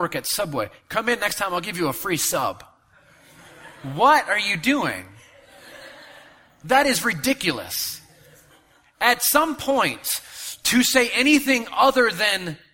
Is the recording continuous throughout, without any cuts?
yes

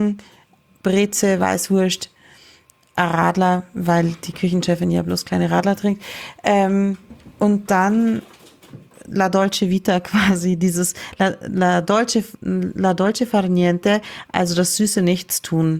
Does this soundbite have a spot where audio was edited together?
no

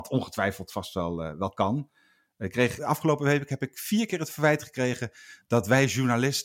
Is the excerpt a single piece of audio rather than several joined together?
no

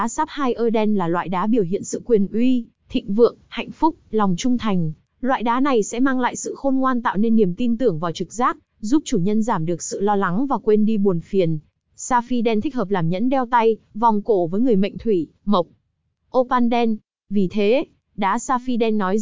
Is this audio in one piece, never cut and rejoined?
no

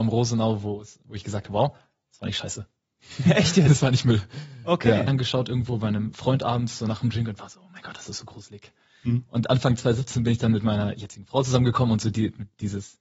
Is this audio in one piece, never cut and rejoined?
no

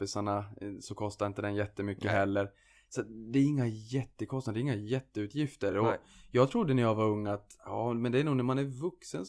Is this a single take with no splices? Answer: yes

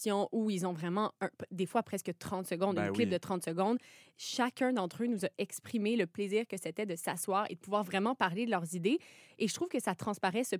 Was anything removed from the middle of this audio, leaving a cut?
no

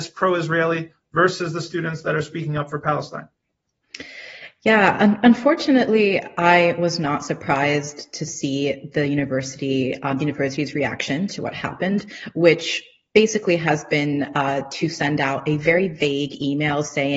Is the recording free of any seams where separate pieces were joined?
yes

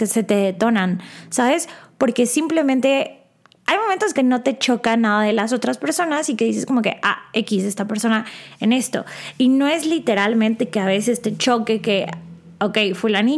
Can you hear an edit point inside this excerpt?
yes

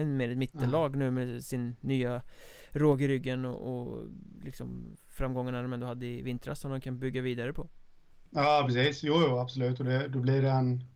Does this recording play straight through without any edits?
yes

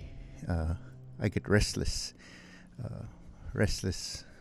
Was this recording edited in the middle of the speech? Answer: no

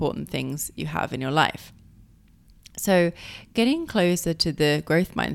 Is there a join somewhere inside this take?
no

